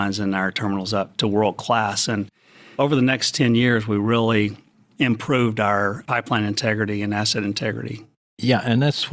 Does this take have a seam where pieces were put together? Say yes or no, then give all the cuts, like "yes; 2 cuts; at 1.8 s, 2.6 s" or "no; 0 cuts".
no; 0 cuts